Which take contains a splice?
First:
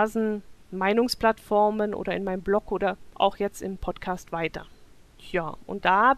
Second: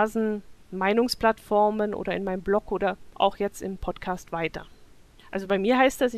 second; 1 cut; at 5.2 s

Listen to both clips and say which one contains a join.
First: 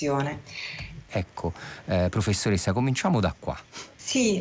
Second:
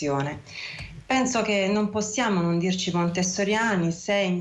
first; 1 cut; at 1.1 s

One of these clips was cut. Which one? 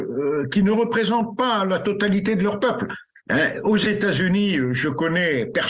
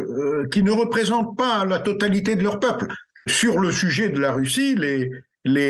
first; 1 cut; at 3.2 s

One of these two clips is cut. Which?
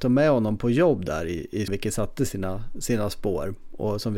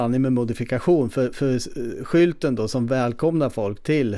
first; 1 cut; at 1.7 s

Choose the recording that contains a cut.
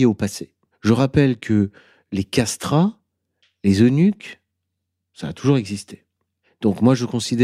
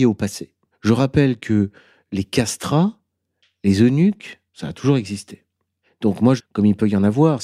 second; 2 cuts; at 4.5 s, 6.4 s

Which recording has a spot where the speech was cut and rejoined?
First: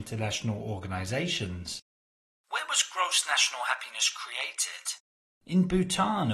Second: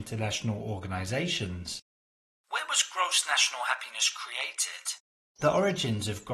second; 1 cut; at 5.4 s

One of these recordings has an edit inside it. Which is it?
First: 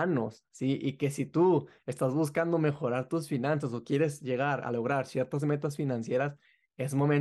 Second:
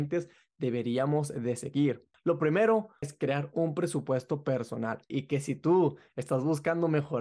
second; 2 cuts; at 3.0 s, 5.1 s

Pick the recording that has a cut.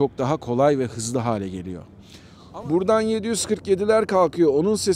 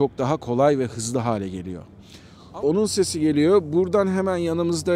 second; 1 cut; at 2.6 s

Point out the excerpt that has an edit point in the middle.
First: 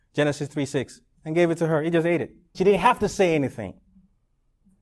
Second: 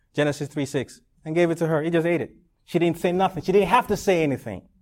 first; 1 cut; at 2.5 s

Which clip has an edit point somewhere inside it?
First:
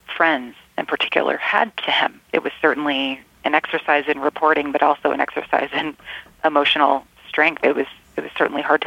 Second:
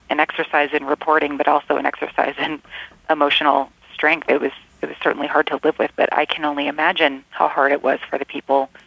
first; 1 cut; at 2.2 s

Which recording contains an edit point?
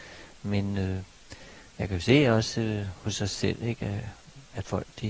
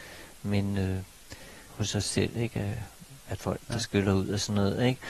second; 2 cuts; at 1.7 s, 3.6 s

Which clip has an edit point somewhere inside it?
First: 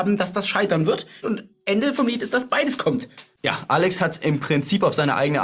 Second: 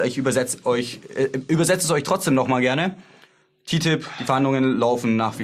first; 1 cut; at 1.2 s

